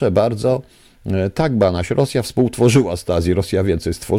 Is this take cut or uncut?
uncut